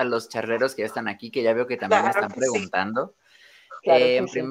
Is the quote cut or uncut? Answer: uncut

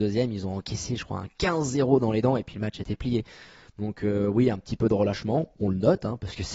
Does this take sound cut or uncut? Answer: uncut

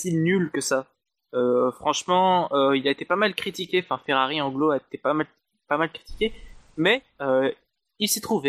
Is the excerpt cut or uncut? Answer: uncut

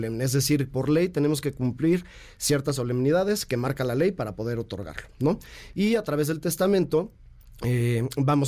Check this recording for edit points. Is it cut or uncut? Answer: uncut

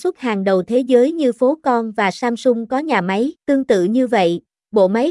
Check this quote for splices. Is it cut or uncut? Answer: cut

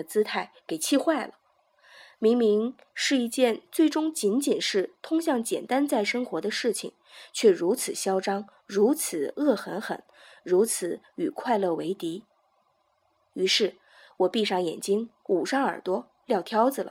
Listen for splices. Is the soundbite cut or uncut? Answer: uncut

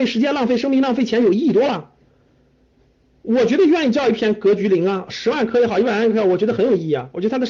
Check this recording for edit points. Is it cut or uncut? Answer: uncut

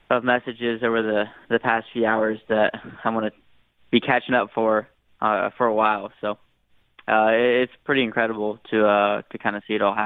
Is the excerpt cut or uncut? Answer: uncut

